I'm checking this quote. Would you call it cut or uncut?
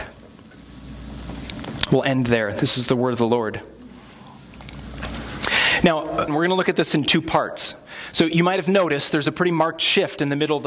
cut